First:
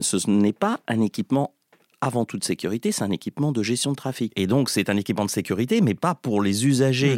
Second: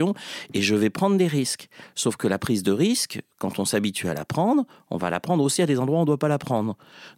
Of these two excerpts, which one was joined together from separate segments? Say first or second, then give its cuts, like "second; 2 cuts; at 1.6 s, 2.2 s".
first; 1 cut; at 4.3 s